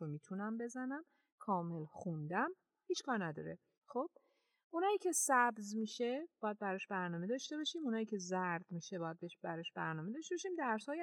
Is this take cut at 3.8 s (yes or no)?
yes